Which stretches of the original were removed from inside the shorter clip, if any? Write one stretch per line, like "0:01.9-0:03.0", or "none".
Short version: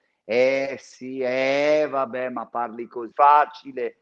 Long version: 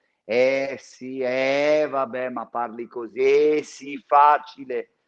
0:03.1-0:04.0